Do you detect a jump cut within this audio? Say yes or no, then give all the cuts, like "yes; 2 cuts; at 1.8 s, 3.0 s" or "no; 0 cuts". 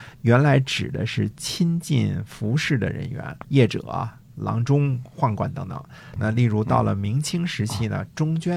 yes; 2 cuts; at 3.4 s, 6.2 s